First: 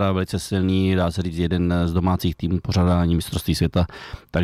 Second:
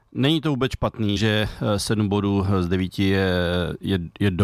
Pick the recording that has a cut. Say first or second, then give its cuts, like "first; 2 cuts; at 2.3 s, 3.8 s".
second; 1 cut; at 1.2 s